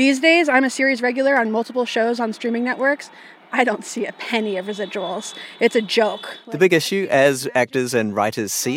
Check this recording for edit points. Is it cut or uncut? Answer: uncut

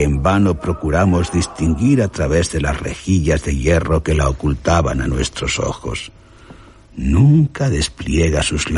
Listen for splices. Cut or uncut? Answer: cut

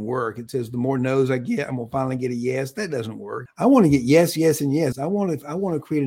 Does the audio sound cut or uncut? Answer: cut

